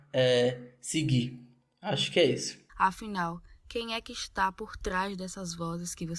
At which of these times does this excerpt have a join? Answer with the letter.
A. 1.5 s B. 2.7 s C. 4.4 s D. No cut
B